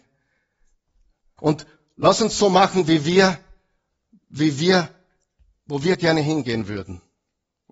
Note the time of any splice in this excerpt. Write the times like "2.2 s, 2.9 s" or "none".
1.4 s